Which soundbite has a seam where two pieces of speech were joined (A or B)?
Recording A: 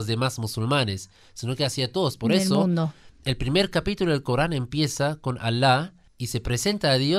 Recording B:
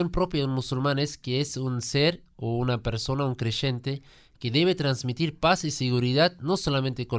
A